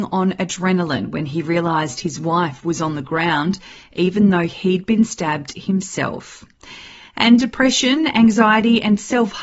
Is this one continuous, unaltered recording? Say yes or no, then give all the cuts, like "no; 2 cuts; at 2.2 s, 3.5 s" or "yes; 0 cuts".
yes; 0 cuts